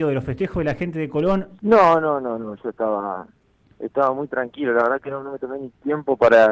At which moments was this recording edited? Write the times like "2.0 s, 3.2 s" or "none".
1.6 s